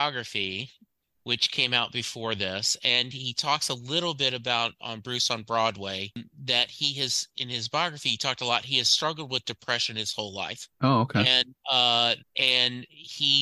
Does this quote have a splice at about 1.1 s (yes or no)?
no